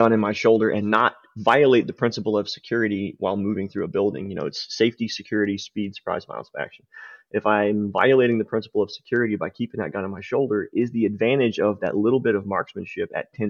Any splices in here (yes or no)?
no